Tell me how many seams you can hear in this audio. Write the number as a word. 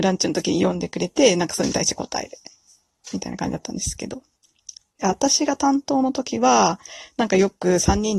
zero